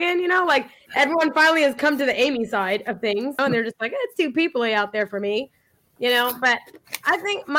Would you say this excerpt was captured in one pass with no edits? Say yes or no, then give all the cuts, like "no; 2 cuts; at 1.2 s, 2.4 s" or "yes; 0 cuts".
no; 1 cut; at 3.4 s